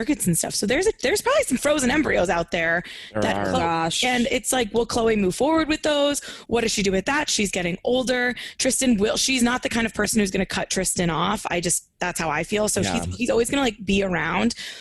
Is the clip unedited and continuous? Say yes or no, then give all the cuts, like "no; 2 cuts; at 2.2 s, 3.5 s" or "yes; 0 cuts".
yes; 0 cuts